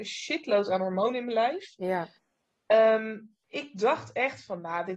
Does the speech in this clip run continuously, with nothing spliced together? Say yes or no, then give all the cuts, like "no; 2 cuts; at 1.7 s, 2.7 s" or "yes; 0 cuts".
no; 1 cut; at 3.4 s